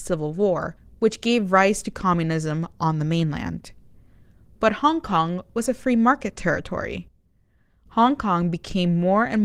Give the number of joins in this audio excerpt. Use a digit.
0